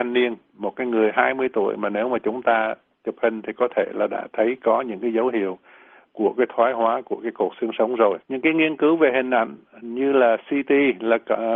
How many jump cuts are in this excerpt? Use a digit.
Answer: 1